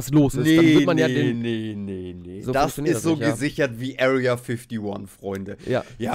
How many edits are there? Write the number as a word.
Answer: zero